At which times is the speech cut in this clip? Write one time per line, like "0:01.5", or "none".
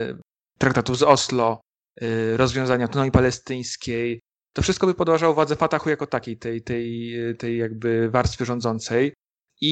none

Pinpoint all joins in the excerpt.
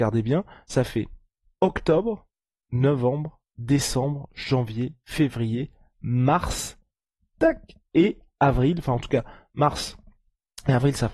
none

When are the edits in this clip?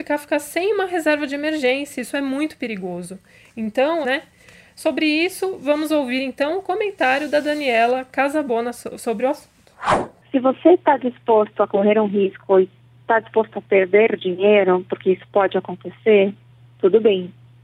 0:04.0

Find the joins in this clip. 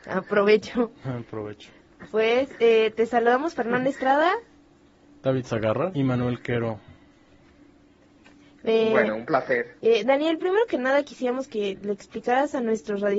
0:09.8

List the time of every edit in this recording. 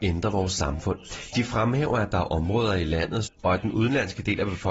0:01.3
0:03.3

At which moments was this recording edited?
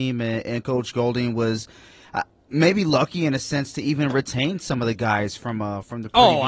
none

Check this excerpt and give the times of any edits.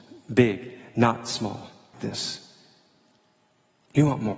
0:01.9

